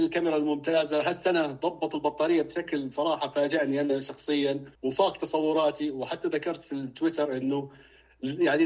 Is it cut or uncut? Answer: cut